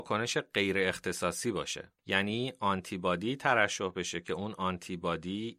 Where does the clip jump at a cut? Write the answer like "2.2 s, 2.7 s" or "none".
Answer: 2.0 s